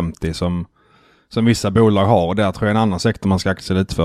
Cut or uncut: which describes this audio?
uncut